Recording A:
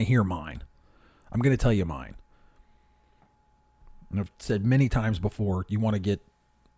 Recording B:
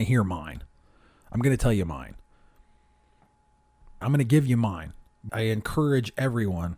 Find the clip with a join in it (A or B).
B